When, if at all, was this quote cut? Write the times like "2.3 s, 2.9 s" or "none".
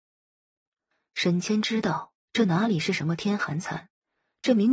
none